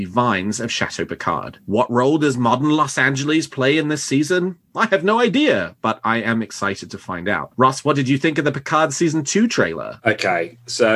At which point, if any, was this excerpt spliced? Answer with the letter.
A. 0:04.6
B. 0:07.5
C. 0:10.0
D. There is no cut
D